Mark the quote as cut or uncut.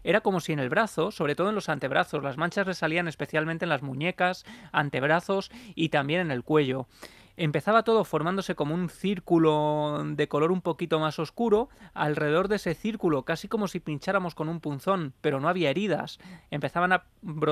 uncut